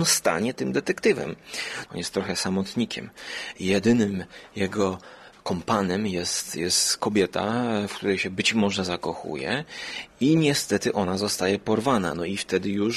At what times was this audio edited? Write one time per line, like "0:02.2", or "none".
0:01.9